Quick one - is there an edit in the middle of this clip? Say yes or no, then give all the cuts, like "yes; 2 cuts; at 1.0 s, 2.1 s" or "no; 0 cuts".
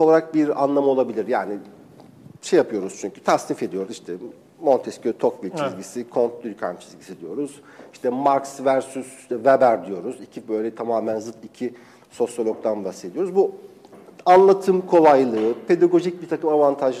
no; 0 cuts